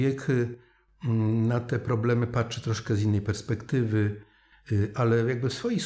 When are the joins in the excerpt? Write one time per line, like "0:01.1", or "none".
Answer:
none